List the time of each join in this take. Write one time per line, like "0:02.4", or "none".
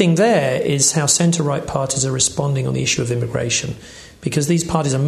none